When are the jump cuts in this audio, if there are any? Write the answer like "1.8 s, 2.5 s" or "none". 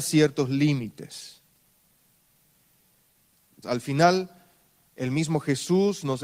3.6 s